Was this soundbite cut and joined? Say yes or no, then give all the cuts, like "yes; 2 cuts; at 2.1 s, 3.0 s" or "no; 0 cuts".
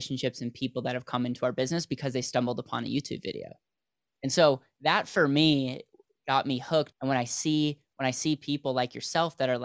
yes; 1 cut; at 6.9 s